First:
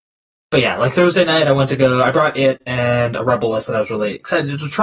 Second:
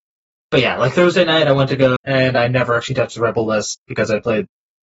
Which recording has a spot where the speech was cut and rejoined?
second; 1 cut; at 2.0 s

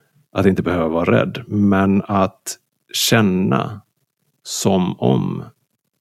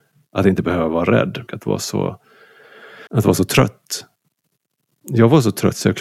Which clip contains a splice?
second; 2 cuts; at 1.5 s, 3.1 s

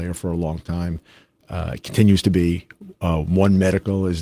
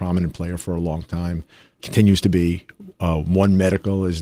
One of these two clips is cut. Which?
second; 1 cut; at 1.8 s

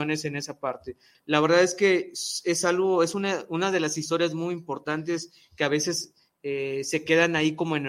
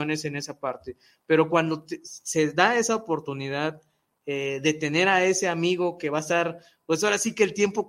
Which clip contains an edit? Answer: first; 1 cut; at 1.1 s

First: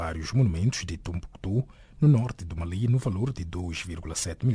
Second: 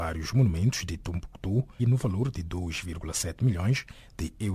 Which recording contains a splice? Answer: second; 1 cut; at 1.8 s

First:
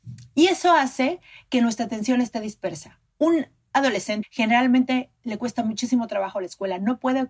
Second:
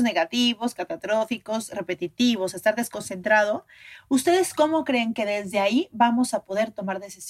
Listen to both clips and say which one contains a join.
first; 1 cut; at 4.2 s

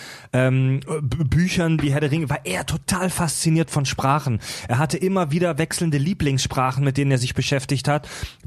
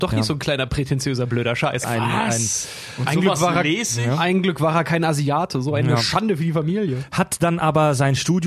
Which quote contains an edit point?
second; 1 cut; at 1.8 s

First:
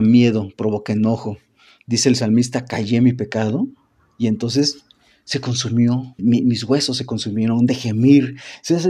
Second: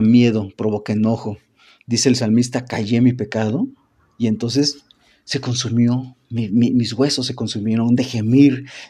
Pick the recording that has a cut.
first; 1 cut; at 6.2 s

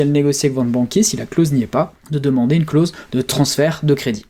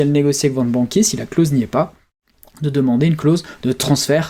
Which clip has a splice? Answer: first; 1 cut; at 2.0 s

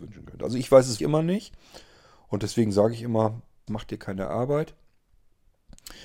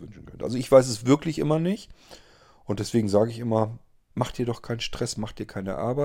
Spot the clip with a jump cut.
first; 2 cuts; at 1.0 s, 3.7 s

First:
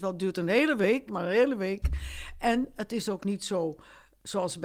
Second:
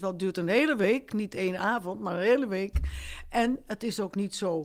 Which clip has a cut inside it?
first; 1 cut; at 1.1 s

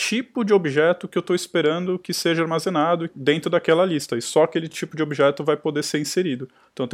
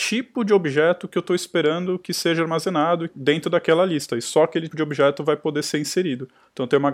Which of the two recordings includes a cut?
second; 1 cut; at 4.7 s

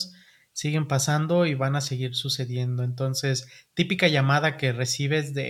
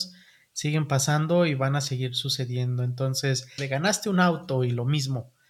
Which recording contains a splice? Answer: second; 1 cut; at 3.6 s

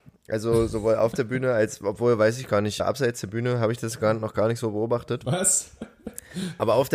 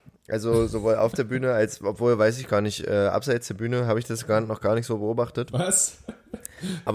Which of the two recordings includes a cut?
first; 1 cut; at 2.8 s

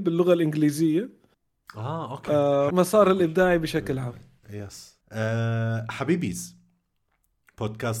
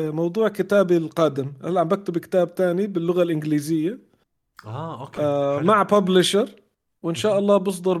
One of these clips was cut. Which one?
first; 2 cuts; at 2.7 s, 5.0 s

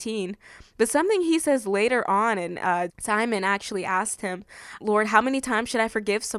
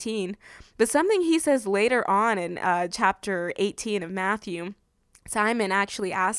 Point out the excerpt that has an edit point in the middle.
first; 2 cuts; at 2.9 s, 4.8 s

